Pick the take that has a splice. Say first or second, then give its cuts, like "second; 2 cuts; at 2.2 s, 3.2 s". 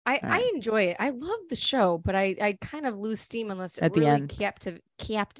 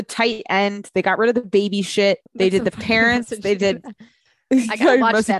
second; 1 cut; at 2.3 s